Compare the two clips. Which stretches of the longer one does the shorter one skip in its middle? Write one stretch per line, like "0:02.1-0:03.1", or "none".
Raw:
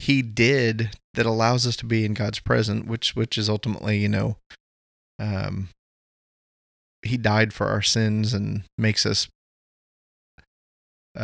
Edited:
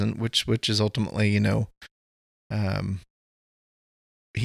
none